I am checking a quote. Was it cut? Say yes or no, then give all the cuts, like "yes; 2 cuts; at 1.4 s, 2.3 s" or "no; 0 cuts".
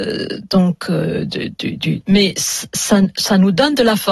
yes; 1 cut; at 2.0 s